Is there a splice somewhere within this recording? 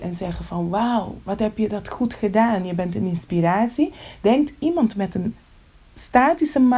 no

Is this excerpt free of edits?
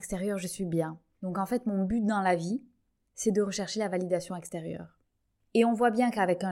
yes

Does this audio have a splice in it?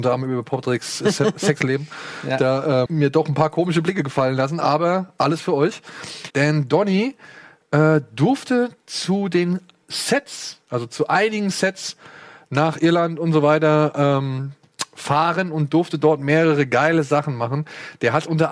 yes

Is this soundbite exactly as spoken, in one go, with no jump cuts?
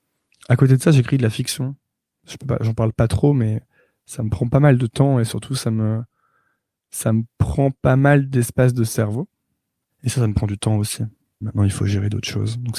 no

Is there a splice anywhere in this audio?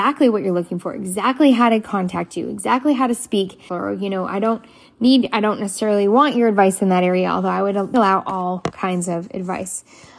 yes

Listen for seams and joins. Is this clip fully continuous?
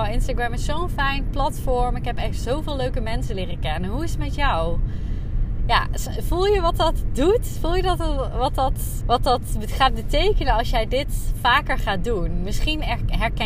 no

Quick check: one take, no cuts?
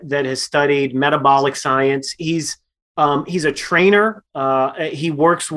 yes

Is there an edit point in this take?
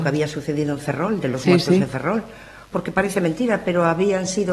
no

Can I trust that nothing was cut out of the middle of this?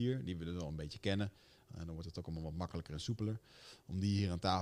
yes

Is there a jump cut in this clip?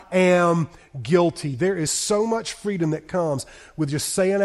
no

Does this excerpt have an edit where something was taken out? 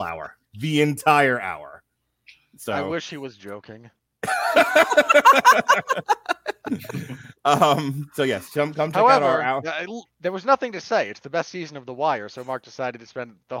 yes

